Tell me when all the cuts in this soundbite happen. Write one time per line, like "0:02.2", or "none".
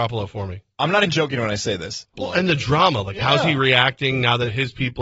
0:01.1
0:02.1